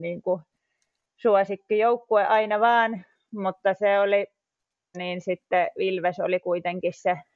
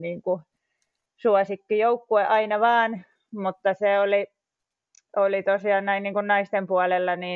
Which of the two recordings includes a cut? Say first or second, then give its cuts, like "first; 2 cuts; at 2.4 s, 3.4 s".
first; 1 cut; at 4.9 s